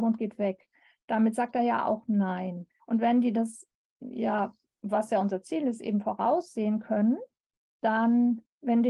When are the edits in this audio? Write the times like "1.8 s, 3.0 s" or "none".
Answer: 2.8 s